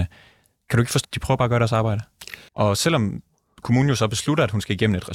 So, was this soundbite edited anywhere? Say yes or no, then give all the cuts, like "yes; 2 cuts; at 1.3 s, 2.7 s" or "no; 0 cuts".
yes; 2 cuts; at 1.0 s, 2.5 s